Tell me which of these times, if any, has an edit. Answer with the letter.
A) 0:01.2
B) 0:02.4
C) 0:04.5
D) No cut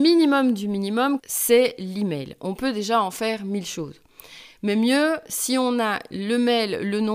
A